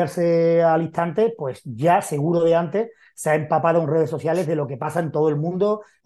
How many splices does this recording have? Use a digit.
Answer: 0